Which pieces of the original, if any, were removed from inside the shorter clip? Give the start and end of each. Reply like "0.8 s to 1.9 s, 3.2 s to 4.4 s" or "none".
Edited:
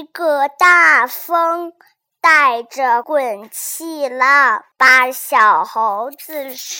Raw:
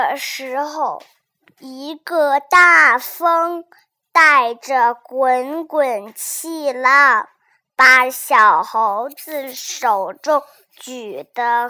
4.9 s to 5.7 s, 7.4 s to 7.7 s

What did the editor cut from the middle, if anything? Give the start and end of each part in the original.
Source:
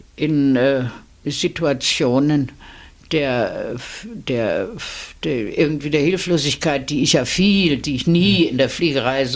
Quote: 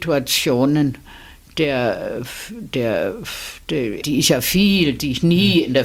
5.6 s to 6.9 s

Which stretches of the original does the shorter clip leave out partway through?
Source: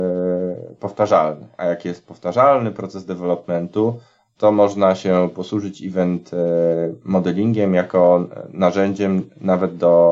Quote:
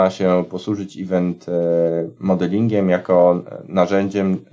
none

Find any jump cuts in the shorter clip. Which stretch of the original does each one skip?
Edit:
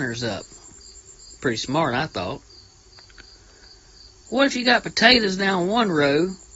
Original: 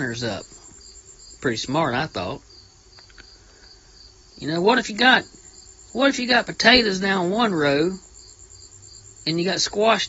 4.2 s to 5.9 s

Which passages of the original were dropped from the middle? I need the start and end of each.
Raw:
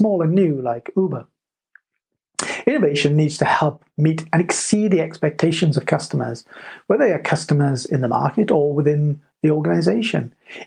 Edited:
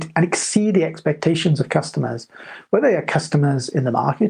none

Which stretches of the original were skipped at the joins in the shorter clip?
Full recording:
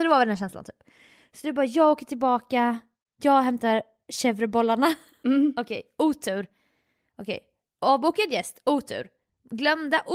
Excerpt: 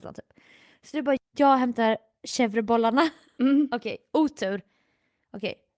1.7 s to 3.0 s

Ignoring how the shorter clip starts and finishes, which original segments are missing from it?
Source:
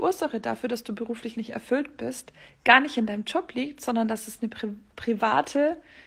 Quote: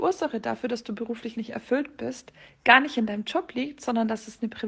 none

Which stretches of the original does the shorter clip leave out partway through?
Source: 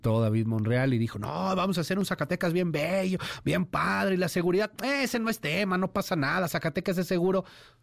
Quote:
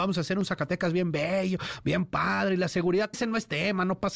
4.7 s to 5.1 s

